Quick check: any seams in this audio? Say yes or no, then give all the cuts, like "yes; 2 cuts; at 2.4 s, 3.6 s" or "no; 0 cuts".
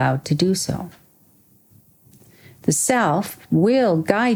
no; 0 cuts